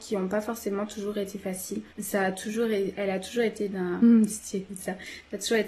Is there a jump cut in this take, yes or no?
yes